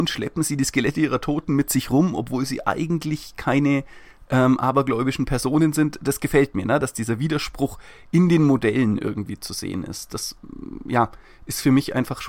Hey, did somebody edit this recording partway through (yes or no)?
no